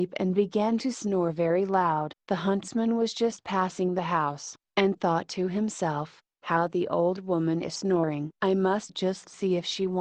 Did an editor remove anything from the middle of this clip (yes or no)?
no